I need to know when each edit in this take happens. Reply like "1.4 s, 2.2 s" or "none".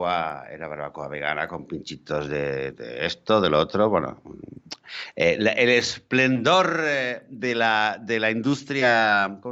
2.7 s